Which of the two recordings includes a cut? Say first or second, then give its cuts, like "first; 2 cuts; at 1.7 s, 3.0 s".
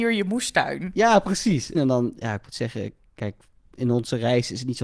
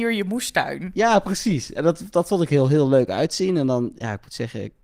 first; 1 cut; at 1.7 s